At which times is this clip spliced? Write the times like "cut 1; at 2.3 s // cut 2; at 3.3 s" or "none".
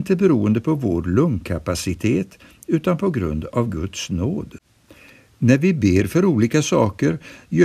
none